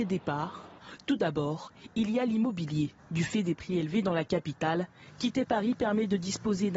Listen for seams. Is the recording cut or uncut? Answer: cut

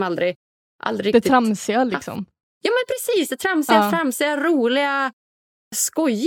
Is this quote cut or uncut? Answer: uncut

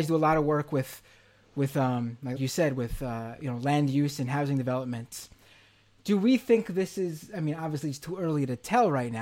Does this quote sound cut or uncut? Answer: cut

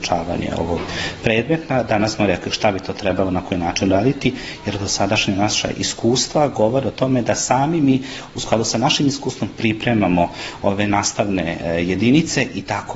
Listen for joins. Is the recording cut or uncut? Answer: uncut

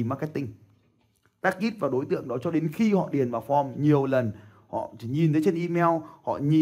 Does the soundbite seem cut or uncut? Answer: uncut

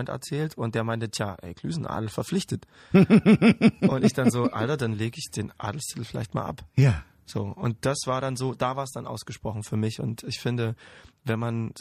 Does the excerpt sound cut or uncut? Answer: uncut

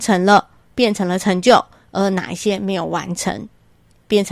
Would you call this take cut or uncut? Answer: uncut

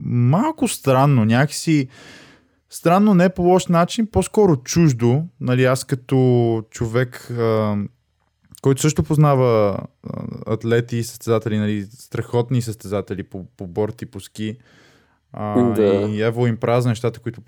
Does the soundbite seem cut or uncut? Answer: uncut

